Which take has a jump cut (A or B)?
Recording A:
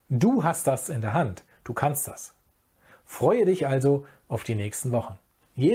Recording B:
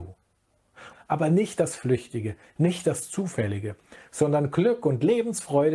B